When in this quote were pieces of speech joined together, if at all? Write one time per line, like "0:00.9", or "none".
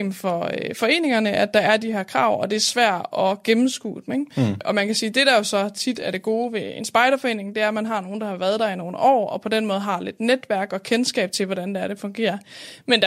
none